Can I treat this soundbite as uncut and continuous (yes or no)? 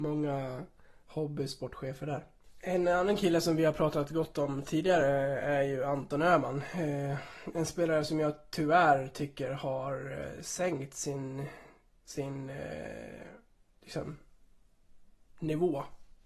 yes